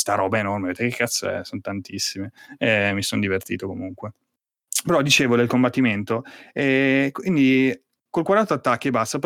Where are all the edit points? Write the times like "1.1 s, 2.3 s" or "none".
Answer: none